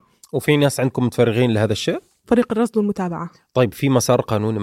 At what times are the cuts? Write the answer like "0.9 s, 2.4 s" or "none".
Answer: 2.2 s